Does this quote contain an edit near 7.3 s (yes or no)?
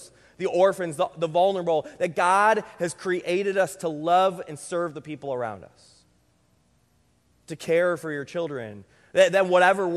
yes